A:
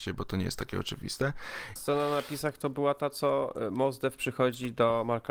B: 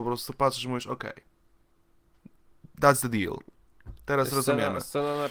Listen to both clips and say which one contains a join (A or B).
A